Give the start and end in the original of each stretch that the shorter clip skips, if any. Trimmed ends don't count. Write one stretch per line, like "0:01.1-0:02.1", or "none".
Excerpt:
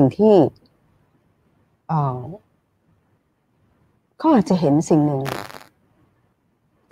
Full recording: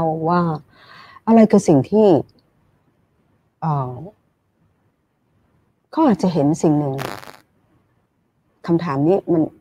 none